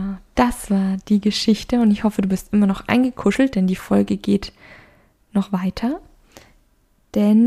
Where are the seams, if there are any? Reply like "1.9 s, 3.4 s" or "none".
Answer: none